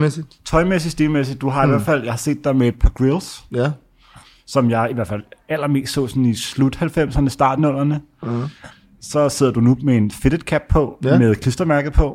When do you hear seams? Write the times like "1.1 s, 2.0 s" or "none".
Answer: none